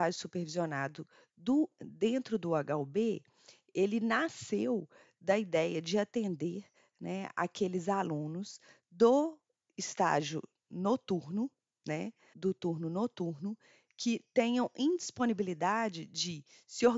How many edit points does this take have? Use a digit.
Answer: 1